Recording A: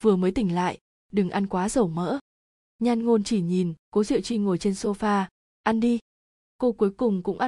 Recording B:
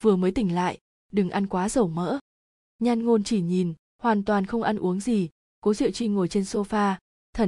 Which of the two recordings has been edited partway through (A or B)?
A